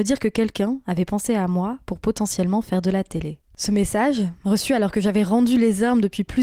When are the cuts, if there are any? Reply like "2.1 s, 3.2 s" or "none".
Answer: none